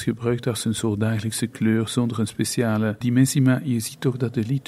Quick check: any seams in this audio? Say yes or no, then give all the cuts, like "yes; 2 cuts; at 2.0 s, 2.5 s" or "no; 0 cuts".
yes; 1 cut; at 3.0 s